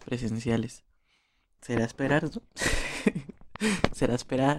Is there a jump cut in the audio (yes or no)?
yes